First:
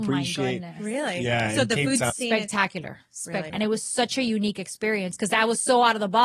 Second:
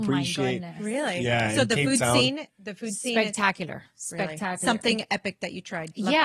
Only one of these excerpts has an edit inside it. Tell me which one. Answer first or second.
first